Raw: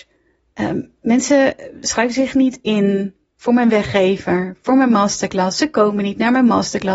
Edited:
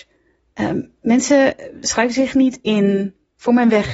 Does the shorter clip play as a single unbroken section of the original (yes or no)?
yes